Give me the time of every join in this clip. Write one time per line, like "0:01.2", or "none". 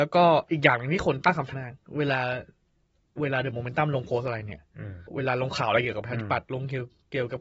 0:01.5
0:05.1